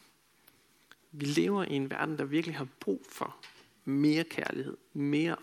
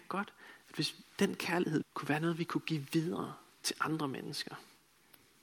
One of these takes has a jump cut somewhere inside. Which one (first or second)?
second